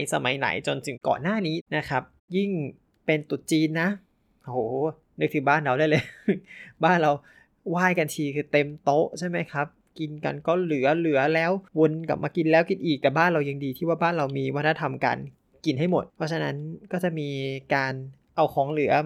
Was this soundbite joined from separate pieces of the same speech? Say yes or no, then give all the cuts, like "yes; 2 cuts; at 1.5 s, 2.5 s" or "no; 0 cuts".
yes; 2 cuts; at 11.7 s, 16.1 s